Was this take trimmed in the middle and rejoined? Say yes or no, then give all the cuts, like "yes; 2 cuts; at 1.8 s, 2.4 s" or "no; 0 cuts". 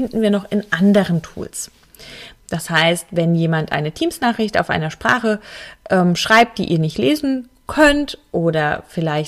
yes; 1 cut; at 2.4 s